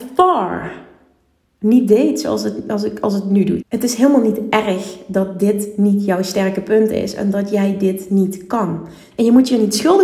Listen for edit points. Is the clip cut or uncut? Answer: cut